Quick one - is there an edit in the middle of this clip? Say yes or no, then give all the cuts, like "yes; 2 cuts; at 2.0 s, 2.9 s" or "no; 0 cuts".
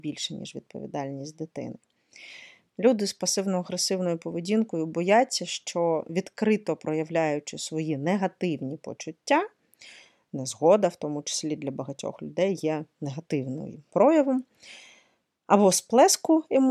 yes; 1 cut; at 2.7 s